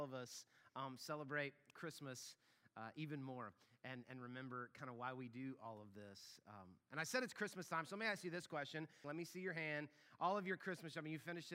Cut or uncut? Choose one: cut